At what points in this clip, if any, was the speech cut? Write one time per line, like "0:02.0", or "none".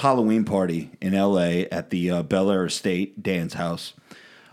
none